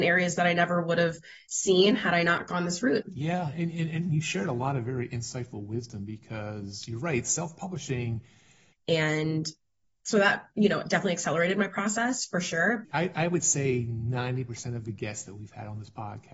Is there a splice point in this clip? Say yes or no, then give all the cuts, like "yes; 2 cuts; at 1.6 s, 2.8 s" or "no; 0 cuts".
yes; 3 cuts; at 3.0 s, 8.7 s, 12.8 s